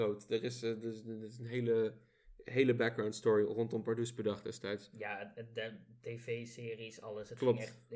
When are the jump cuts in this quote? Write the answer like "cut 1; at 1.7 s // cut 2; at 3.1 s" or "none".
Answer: none